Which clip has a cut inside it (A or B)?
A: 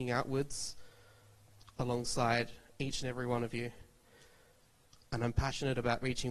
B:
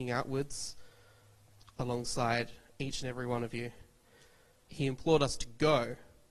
B